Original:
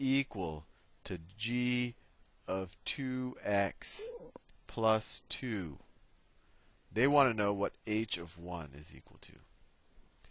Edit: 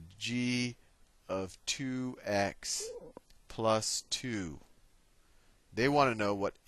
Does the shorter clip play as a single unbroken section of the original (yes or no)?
yes